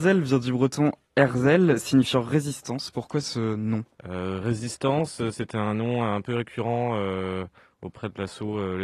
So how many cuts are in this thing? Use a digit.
1